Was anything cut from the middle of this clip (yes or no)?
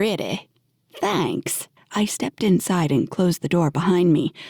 yes